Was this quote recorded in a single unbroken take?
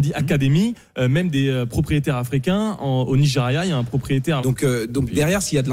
no; 1 cut; at 4.4 s

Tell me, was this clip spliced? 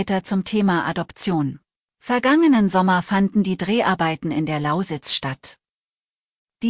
yes; 1 cut; at 1.9 s

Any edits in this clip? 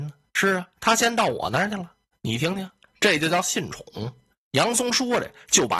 yes; 1 cut; at 2.1 s

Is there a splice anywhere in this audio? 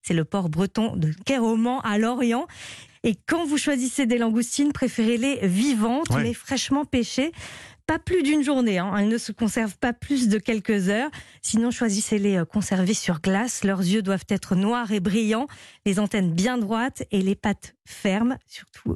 no; 0 cuts

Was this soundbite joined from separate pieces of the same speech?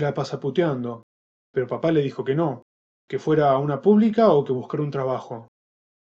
yes; 1 cut; at 1.4 s

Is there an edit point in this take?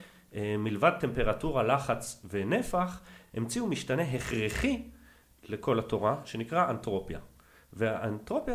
no; 0 cuts

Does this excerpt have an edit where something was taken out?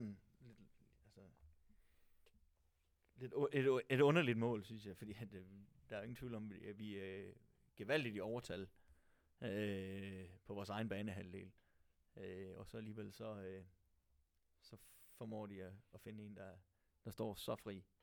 no; 0 cuts

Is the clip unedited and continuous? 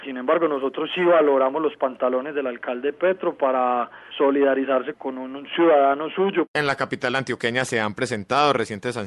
no; 1 cut; at 4.9 s

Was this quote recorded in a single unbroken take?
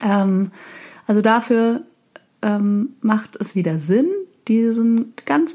yes; 0 cuts

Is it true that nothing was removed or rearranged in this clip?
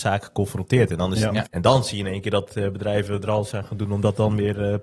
no; 1 cut; at 1.5 s

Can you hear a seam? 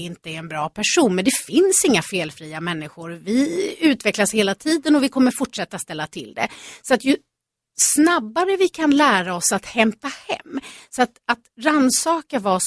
yes; 1 cut; at 10.8 s

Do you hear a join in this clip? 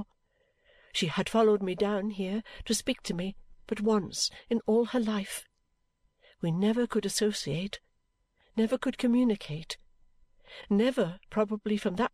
no; 0 cuts

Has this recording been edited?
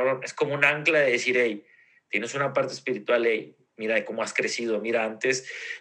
no; 0 cuts

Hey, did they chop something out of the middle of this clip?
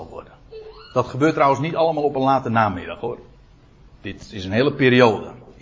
no; 0 cuts

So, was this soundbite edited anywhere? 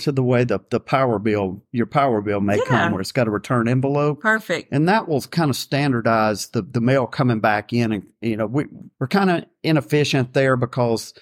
yes; 1 cut; at 8.9 s

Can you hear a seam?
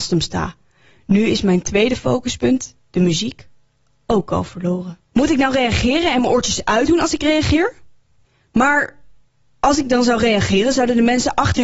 yes; 1 cut; at 5.1 s

